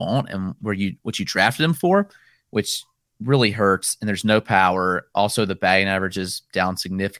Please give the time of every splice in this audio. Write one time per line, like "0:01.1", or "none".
none